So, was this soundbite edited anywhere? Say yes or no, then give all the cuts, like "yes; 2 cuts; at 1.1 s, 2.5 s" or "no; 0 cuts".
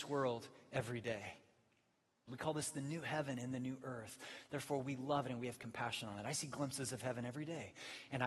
yes; 1 cut; at 2.3 s